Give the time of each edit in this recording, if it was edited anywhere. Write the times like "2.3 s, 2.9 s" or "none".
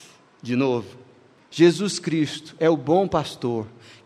1.4 s